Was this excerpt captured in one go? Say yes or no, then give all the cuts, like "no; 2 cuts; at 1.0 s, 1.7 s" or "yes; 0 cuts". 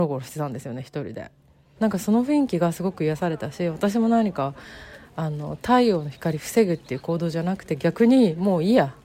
no; 1 cut; at 1.8 s